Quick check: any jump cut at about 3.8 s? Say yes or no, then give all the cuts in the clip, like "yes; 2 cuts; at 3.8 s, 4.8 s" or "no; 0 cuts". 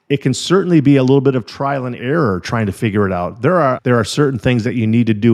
yes; 1 cut; at 3.8 s